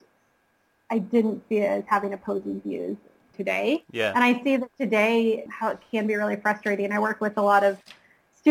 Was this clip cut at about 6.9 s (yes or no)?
no